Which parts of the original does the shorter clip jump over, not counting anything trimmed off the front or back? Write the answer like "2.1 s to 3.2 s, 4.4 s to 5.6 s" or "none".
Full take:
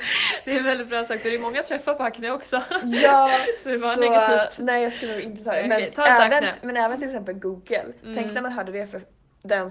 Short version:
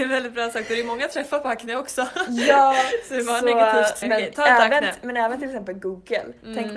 4.6 s to 5.6 s